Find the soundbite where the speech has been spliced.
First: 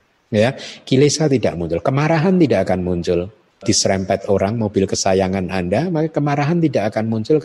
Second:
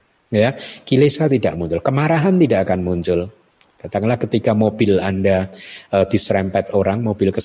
first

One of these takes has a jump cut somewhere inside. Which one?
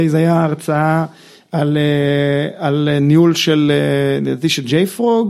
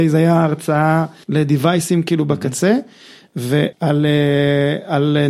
second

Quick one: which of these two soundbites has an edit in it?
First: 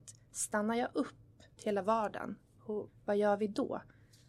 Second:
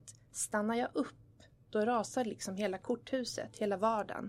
first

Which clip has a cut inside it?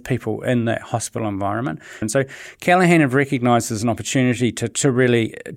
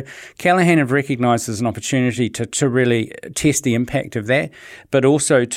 first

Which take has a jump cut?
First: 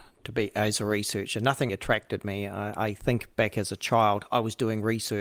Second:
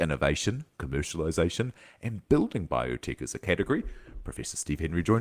first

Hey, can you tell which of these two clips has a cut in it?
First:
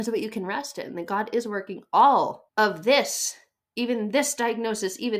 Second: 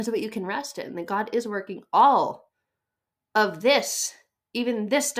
first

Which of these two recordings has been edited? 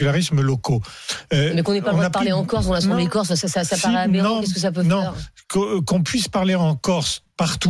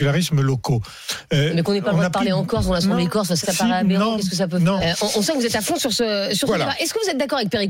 second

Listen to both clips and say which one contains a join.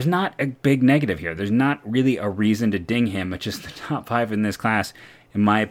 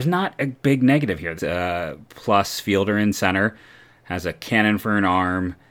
second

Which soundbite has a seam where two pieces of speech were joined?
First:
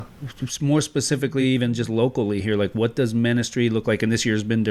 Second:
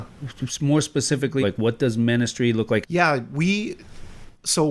second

